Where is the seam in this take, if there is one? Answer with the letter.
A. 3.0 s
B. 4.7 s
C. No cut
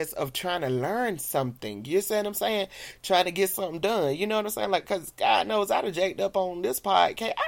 C